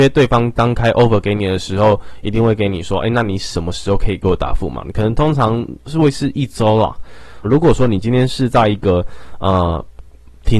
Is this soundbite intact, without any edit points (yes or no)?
no